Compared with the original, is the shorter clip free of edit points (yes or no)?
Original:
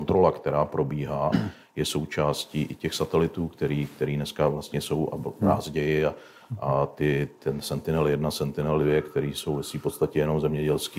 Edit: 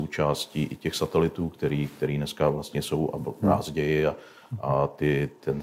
yes